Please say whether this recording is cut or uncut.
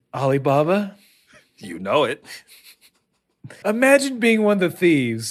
cut